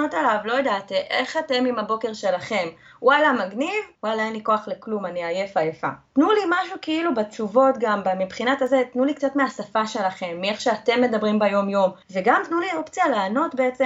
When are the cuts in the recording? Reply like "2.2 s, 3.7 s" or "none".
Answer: 4.0 s, 6.1 s, 12.0 s